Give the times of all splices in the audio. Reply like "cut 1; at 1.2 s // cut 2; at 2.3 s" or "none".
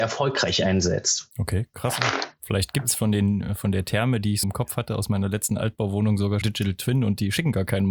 cut 1; at 4.4 s // cut 2; at 6.4 s